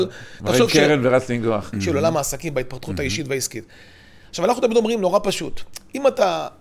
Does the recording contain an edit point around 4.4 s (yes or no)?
no